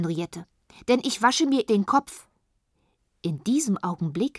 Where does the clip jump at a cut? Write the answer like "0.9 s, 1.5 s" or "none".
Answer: 1.7 s